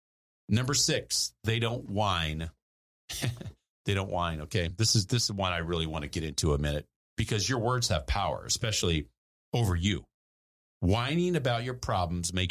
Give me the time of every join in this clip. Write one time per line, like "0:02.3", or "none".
none